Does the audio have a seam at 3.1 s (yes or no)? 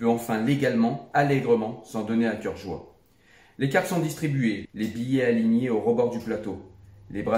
no